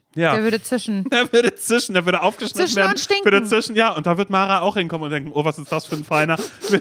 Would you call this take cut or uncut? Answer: uncut